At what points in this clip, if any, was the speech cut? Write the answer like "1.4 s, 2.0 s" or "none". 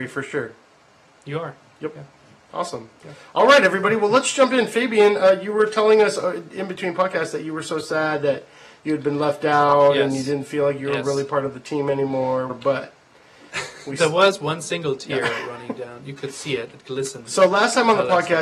12.5 s